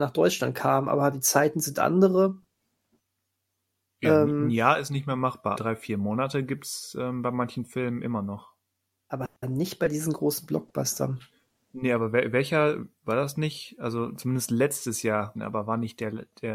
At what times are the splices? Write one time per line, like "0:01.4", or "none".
0:05.6
0:15.4